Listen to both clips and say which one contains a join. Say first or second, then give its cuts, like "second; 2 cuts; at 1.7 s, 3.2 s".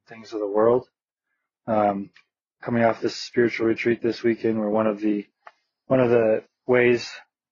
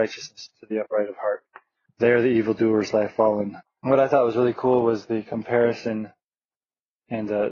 second; 2 cuts; at 1.9 s, 3.6 s